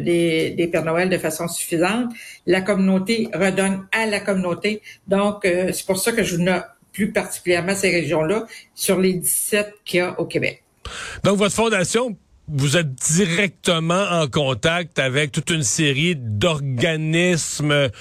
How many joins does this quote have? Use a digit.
1